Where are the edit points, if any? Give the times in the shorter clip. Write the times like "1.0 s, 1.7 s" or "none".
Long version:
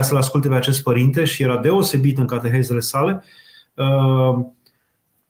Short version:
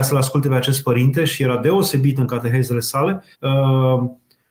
3.3 s